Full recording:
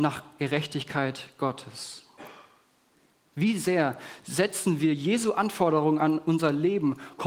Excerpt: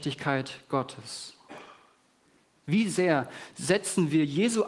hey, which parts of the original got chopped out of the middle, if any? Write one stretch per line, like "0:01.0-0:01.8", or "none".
none